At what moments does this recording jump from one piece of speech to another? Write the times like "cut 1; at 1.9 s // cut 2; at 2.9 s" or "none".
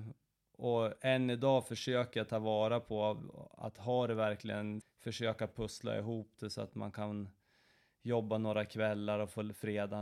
cut 1; at 4.8 s